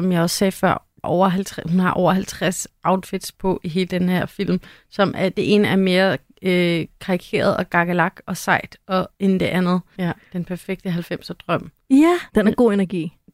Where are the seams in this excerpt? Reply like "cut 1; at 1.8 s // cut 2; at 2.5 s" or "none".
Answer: cut 1; at 1.0 s // cut 2; at 10.0 s // cut 3; at 12.3 s